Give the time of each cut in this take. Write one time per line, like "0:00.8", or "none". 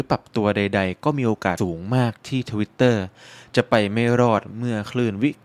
0:01.6